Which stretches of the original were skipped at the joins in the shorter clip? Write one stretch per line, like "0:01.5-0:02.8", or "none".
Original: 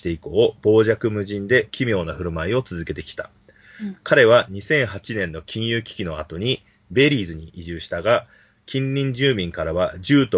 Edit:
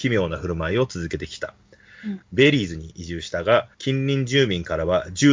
0:04.0-0:06.8
0:08.3-0:08.6